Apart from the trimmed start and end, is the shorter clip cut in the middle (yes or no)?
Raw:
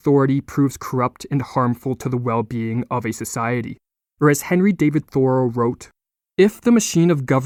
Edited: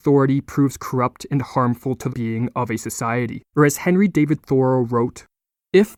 yes